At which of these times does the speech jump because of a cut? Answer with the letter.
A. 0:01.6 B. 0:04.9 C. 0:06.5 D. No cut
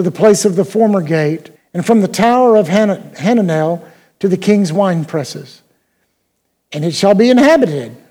A